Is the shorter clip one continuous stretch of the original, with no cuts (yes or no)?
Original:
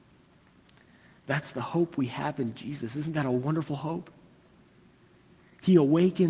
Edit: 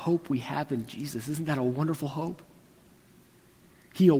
yes